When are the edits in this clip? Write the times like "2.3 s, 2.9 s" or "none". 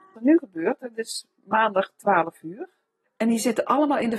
3.0 s

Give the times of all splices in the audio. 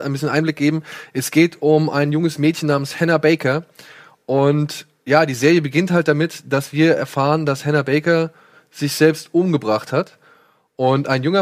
none

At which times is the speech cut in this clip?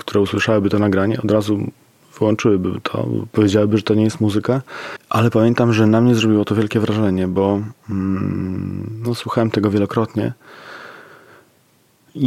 none

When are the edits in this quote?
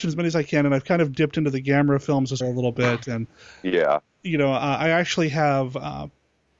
2.4 s

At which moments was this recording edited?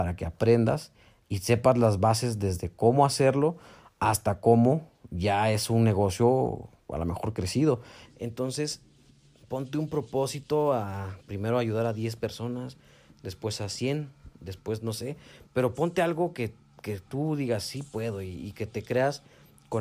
8.1 s

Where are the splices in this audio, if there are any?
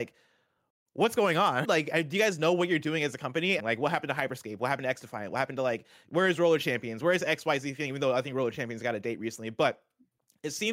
1.6 s, 3.6 s

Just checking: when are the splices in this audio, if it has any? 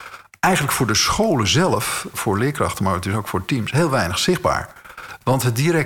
2.1 s

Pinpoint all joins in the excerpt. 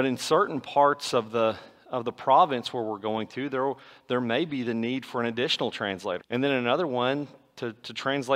6.2 s

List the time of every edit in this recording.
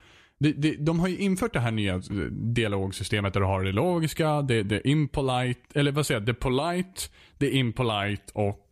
4.6 s

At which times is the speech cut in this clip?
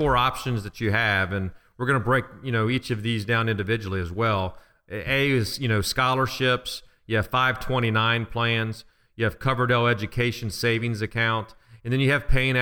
none

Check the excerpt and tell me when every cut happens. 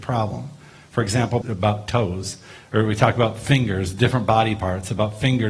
1.4 s

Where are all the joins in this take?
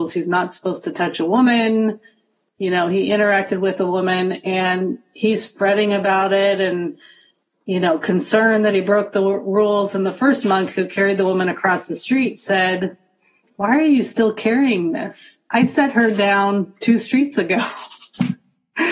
none

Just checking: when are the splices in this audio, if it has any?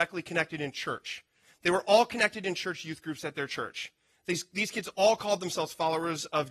none

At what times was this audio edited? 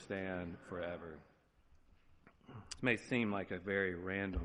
2.8 s

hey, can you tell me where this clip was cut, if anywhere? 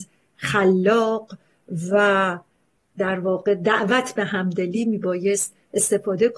none

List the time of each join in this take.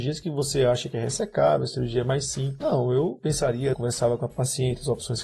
2.6 s, 3.7 s

